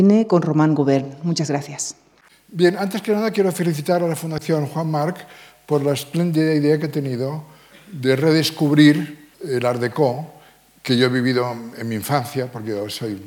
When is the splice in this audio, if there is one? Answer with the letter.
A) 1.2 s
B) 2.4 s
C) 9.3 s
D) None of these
C